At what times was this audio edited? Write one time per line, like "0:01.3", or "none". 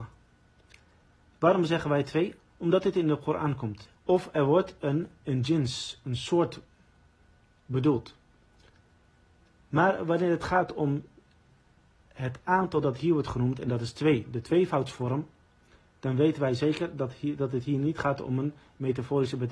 0:03.9
0:09.6

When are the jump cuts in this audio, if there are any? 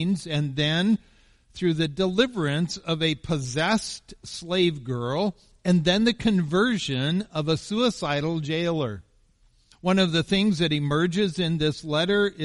0:09.7

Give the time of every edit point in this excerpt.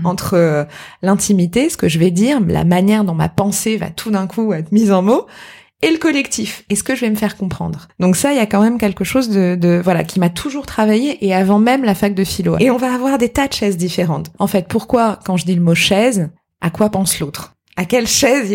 0:12.6
0:14.3

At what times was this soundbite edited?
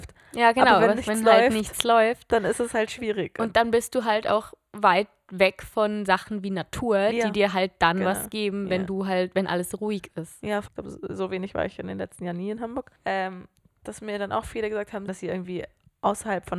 0:10.7
0:13.0
0:15.1

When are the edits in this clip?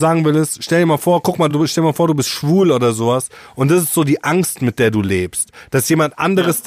none

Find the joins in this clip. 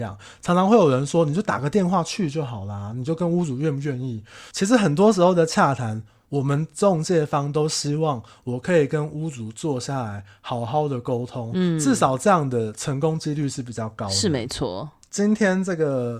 none

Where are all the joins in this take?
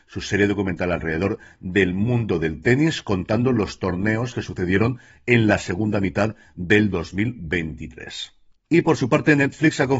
0:08.5

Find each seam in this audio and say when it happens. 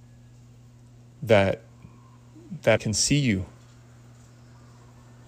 0:02.8

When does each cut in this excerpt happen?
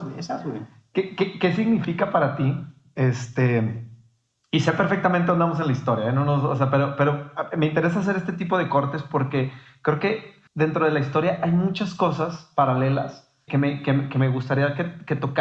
0:10.5
0:13.5

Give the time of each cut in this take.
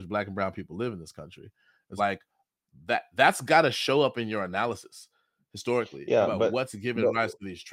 0:02.0

